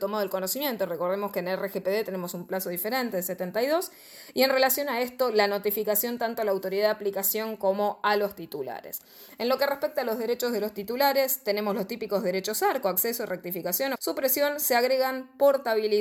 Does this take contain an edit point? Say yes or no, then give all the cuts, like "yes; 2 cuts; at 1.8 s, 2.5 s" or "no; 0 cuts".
yes; 1 cut; at 13.9 s